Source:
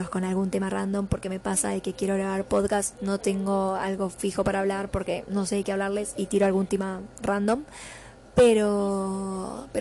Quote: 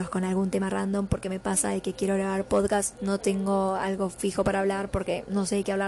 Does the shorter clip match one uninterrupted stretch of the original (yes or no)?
yes